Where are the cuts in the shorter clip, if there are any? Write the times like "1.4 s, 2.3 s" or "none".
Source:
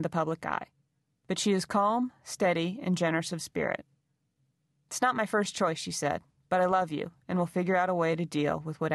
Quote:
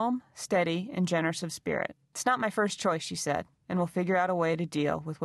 2.0 s, 3.6 s

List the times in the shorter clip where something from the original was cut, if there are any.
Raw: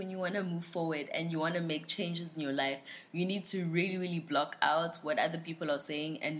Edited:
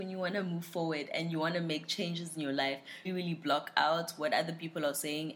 3.0 s

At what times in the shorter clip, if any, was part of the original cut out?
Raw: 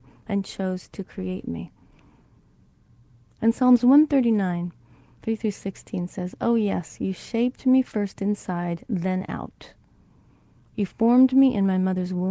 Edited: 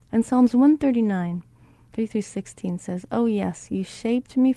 none

